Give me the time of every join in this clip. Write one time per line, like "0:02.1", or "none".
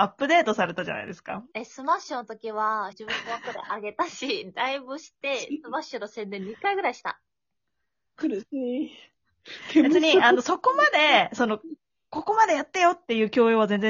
0:01.5
0:02.9